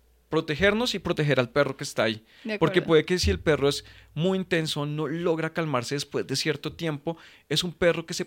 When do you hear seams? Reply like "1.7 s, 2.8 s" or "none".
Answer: none